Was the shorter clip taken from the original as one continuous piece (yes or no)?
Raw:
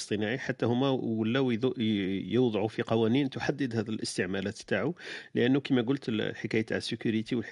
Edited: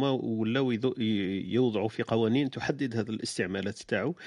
yes